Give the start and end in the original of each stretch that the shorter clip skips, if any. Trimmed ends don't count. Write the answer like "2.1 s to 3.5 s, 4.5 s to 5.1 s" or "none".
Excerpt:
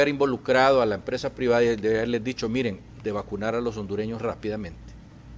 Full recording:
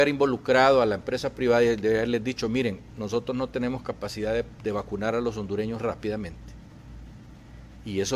3.0 s to 4.6 s